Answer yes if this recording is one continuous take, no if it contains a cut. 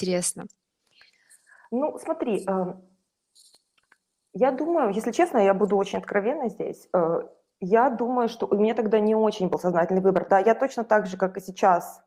yes